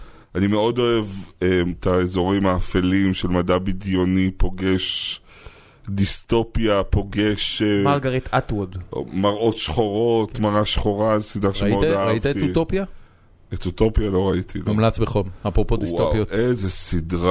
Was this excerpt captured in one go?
yes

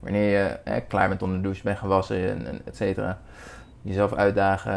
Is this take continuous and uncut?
no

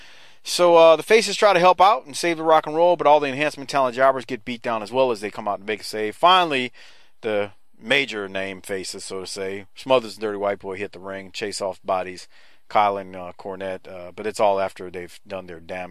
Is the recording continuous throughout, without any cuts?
yes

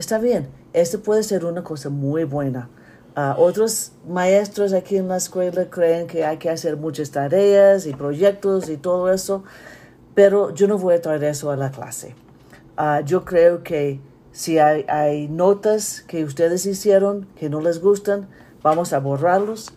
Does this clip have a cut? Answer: no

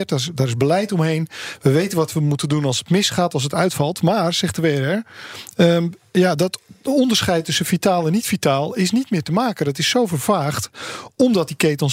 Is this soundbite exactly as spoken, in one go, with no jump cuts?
yes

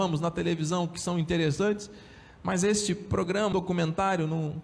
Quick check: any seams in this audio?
yes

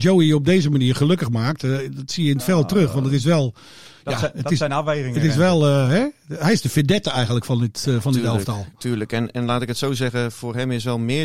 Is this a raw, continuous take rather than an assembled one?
yes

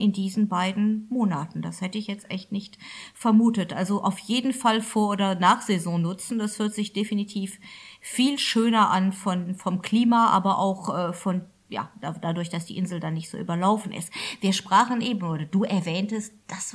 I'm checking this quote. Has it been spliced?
no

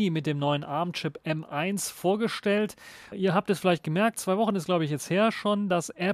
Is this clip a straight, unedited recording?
no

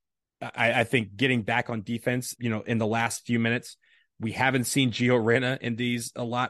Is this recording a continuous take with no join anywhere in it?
no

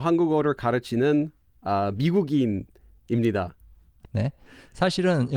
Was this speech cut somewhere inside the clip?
yes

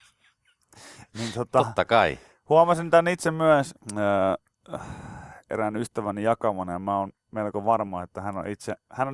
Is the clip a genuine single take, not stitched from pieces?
no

